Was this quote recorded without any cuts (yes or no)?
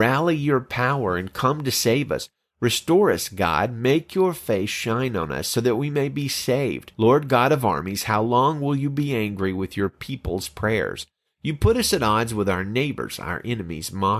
no